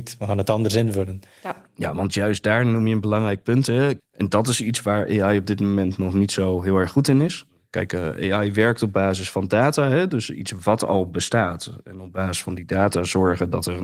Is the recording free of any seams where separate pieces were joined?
no; 1 cut; at 4.0 s

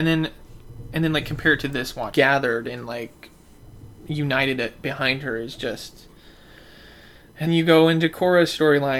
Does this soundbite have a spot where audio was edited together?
yes; 2 cuts; at 2.1 s, 7.5 s

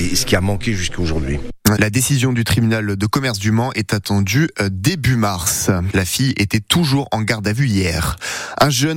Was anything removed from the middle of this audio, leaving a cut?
yes; 2 cuts; at 1.8 s, 5.9 s

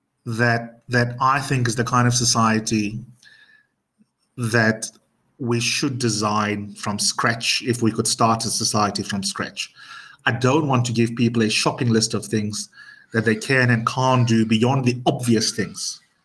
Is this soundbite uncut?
yes; 0 cuts

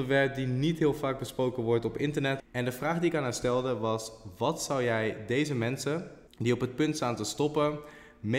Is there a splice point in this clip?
yes; 2 cuts; at 2.4 s, 6.3 s

